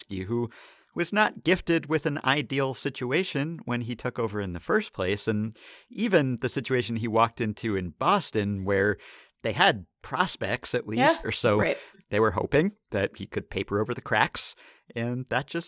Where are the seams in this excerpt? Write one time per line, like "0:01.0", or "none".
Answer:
0:11.2